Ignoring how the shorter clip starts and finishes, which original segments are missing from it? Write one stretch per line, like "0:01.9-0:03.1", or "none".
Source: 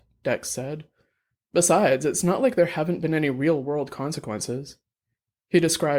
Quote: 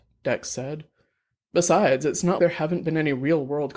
0:02.4-0:02.5